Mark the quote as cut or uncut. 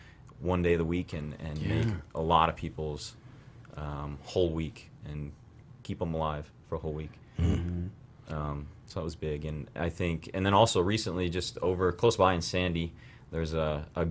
uncut